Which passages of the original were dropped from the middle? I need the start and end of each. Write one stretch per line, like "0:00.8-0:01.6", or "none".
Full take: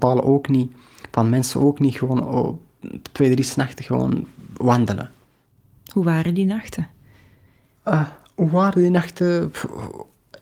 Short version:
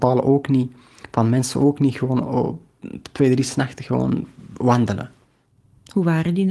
none